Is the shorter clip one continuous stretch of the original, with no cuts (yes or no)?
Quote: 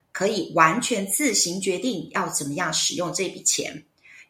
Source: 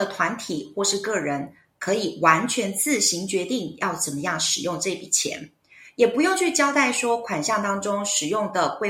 yes